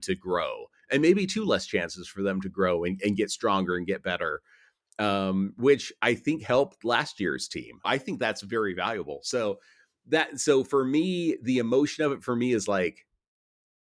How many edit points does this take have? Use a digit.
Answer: 1